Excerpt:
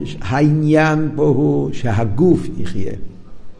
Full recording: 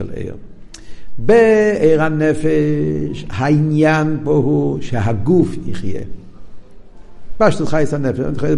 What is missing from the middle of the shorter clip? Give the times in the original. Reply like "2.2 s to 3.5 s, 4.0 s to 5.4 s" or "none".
none